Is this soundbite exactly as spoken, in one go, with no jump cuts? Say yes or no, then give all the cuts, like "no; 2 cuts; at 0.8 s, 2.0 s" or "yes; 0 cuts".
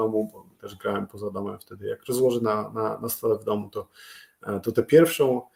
yes; 0 cuts